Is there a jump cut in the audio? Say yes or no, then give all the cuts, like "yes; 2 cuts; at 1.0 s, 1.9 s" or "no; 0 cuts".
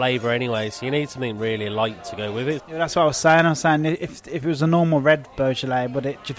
yes; 1 cut; at 2.6 s